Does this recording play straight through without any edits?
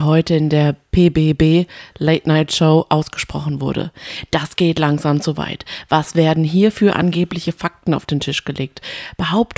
yes; 0 cuts

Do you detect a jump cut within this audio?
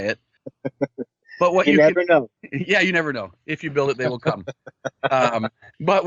no; 0 cuts

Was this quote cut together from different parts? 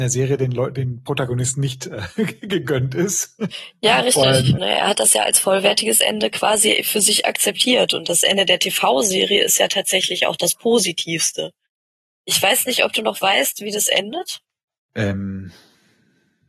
yes; 1 cut; at 4.6 s

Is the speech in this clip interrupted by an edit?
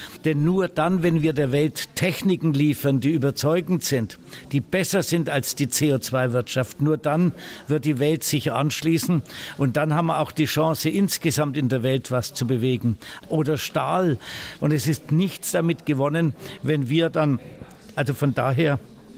yes; 3 cuts; at 13.2 s, 14.6 s, 18.0 s

